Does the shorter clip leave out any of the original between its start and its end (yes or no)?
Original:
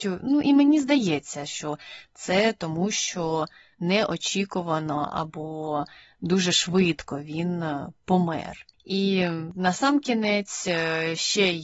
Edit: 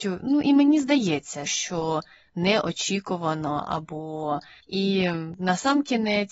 yes